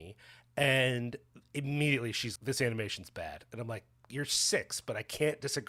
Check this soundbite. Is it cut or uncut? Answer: cut